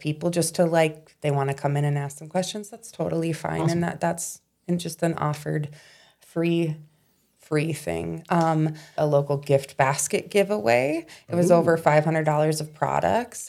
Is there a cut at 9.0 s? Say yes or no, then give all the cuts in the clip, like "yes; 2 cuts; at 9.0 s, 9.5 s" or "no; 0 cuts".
yes; 1 cut; at 9.0 s